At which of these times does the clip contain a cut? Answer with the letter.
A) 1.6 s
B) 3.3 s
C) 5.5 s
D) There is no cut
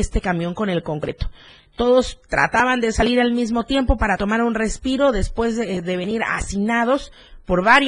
D